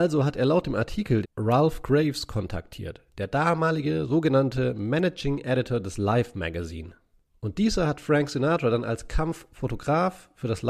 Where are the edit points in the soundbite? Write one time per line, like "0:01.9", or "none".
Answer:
0:01.2